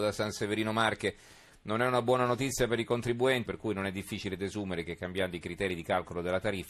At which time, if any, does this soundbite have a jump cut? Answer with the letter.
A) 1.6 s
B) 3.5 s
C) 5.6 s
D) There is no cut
B